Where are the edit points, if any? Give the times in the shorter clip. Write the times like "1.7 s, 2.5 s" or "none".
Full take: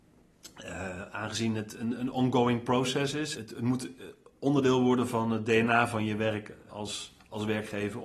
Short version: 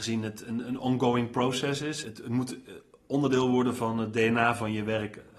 none